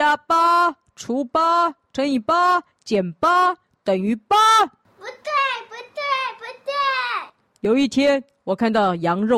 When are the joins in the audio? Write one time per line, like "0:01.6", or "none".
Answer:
none